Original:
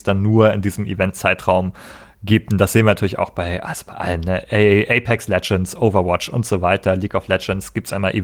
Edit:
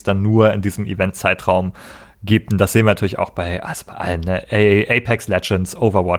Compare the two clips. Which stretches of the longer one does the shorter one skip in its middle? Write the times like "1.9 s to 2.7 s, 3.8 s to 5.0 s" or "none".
none